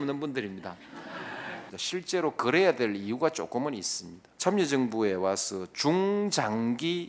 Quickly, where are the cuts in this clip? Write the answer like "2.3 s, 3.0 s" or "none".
1.7 s, 4.3 s